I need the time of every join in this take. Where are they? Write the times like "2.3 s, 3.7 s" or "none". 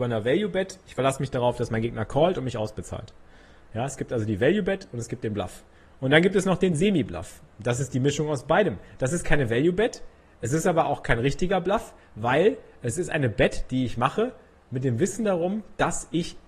none